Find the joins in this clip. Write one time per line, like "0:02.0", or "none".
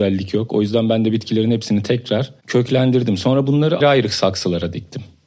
0:03.8